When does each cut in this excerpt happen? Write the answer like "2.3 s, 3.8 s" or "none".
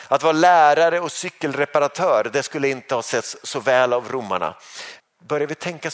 5.0 s